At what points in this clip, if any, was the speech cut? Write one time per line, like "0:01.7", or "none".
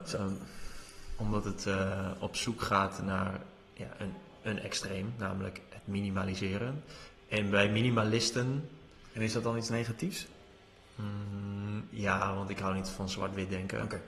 none